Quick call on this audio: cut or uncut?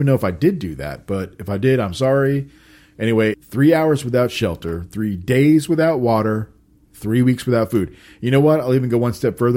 cut